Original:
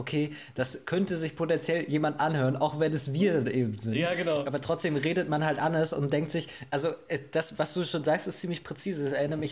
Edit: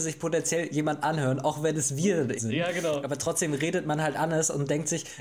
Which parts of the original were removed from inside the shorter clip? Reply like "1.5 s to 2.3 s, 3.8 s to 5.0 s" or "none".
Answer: 3.5 s to 3.8 s